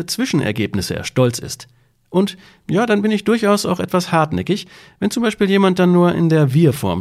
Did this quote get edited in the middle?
no; 0 cuts

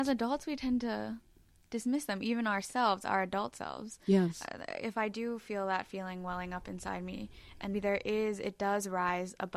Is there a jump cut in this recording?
yes; 1 cut; at 7.7 s

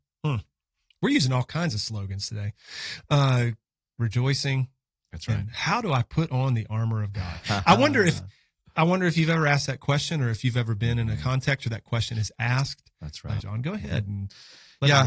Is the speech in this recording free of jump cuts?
no; 2 cuts; at 4.0 s, 13.4 s

